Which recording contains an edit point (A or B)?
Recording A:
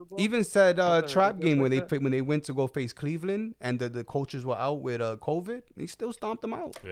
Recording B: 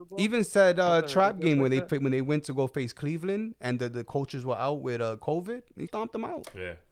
B